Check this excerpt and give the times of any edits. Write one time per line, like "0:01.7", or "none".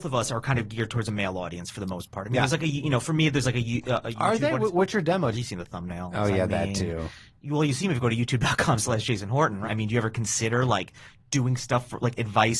0:05.3
0:09.6